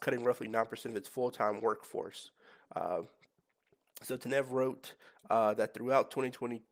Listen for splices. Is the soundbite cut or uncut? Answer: uncut